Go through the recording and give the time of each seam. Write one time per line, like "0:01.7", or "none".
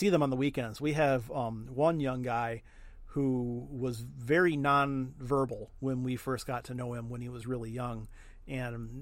none